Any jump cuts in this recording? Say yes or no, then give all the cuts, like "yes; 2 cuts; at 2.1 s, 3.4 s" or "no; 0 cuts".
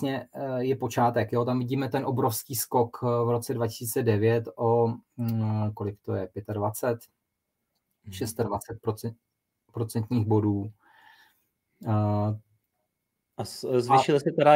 no; 0 cuts